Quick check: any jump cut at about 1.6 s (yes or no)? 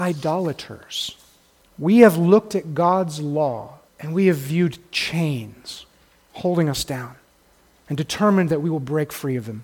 yes